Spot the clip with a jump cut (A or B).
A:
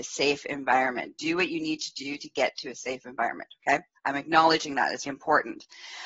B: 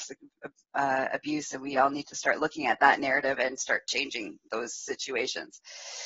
A